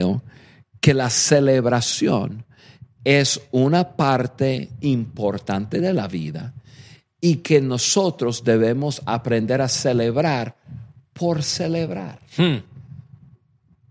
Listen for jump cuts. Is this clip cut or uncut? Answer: uncut